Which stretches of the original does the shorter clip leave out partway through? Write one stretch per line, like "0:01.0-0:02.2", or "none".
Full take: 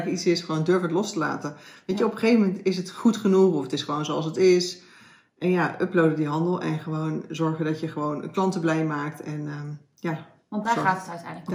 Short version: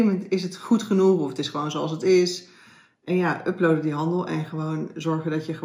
none